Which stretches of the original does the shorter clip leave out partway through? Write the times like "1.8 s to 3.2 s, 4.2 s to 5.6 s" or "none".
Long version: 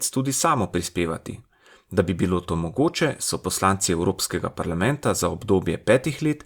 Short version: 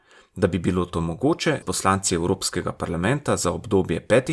3.2 s to 3.4 s